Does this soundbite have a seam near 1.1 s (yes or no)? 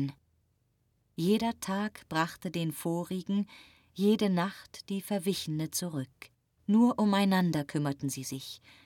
no